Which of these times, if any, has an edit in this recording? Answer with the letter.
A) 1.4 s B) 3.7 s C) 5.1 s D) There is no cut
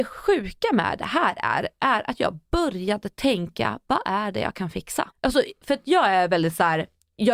C